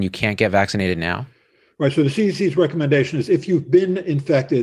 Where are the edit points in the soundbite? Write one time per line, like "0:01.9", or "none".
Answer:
none